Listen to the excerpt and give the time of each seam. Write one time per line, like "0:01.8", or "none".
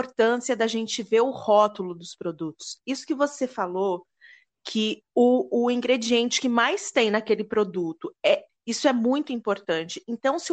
0:08.5